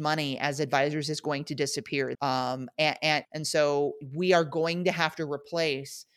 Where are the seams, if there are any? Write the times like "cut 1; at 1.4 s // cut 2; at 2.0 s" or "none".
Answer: cut 1; at 2.1 s // cut 2; at 3.2 s